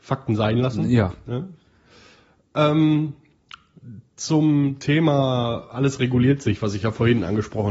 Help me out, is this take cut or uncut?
uncut